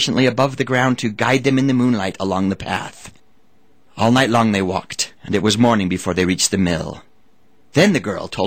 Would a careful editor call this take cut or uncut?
uncut